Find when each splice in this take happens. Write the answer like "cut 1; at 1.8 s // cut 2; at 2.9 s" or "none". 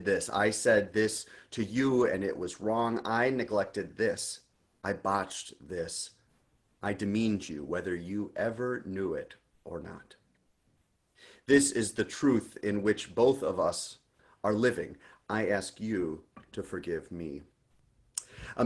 cut 1; at 6.8 s

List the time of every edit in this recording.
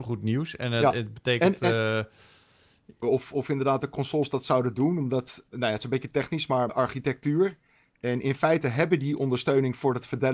cut 1; at 3.0 s // cut 2; at 5.5 s // cut 3; at 6.7 s

